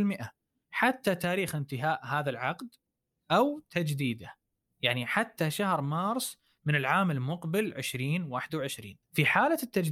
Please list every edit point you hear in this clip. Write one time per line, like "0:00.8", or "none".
0:09.0